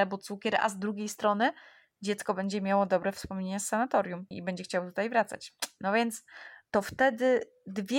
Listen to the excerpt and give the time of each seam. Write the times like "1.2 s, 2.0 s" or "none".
4.3 s, 6.7 s